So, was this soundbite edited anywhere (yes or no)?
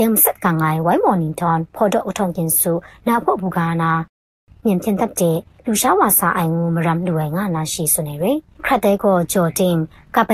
no